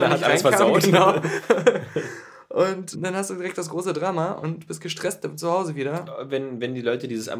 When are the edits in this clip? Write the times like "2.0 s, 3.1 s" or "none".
2.9 s, 6.1 s